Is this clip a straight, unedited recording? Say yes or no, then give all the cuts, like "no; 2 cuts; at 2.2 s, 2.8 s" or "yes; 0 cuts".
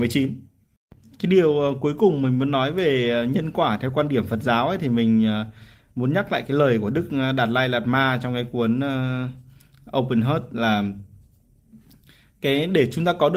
yes; 0 cuts